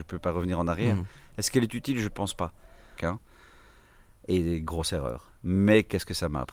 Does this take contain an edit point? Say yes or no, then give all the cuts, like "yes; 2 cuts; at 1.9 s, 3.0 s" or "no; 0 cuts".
yes; 1 cut; at 3.0 s